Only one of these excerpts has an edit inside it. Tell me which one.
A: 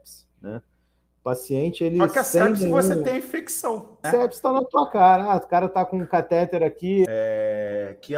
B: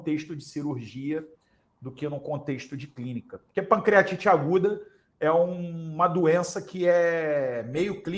A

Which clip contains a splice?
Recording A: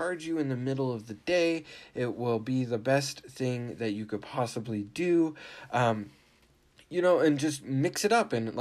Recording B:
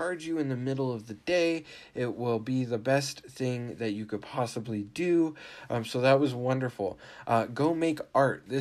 B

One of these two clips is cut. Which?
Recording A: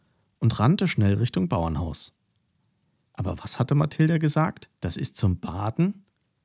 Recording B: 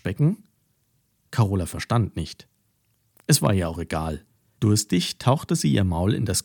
A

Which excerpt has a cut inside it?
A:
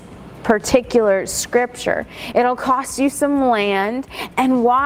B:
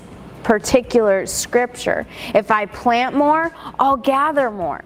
A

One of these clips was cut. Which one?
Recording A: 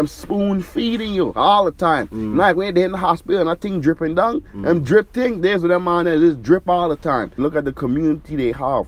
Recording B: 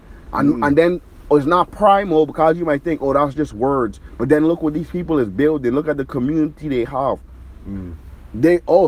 A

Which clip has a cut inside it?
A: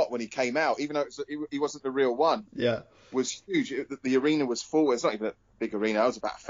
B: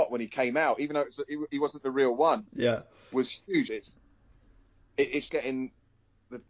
B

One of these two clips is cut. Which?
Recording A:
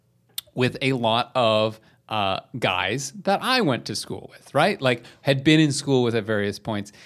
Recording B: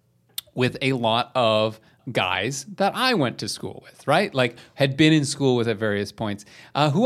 B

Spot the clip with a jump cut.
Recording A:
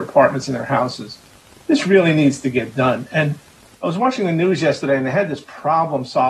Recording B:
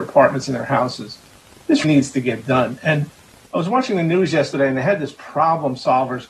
B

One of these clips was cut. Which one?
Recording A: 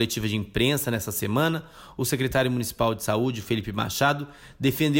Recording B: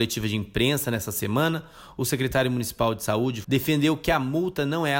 B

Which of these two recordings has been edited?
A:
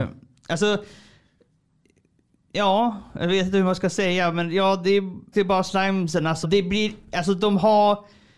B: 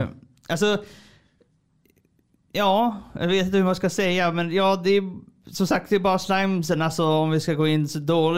A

